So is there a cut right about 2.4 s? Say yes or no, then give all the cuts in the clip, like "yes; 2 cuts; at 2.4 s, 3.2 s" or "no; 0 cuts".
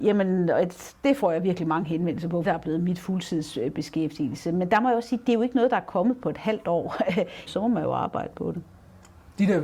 yes; 2 cuts; at 2.4 s, 7.5 s